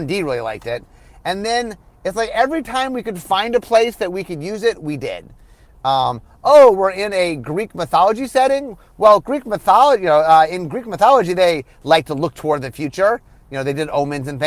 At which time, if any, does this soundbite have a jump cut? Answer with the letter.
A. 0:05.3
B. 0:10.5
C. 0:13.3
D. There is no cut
D